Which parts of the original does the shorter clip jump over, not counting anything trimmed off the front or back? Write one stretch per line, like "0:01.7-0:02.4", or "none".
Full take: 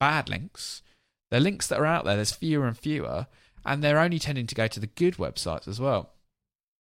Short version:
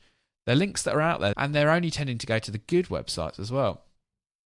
0:02.2-0:03.6